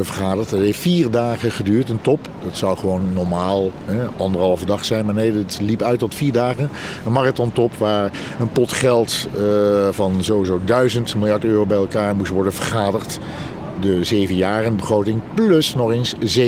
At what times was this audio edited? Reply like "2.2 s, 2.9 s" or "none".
none